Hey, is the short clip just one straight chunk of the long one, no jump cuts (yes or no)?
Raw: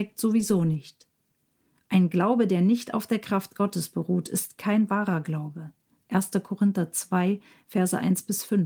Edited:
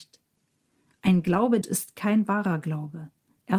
no